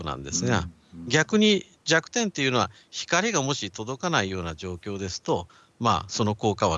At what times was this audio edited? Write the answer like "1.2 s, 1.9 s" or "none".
none